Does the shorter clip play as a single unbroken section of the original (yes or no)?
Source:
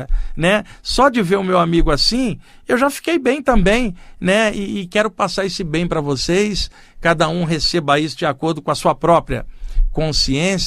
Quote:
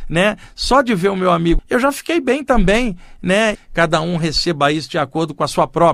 no